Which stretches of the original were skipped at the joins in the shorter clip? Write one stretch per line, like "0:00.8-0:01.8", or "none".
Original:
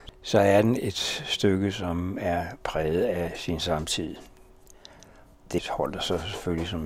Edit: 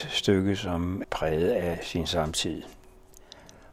0:02.2-0:02.6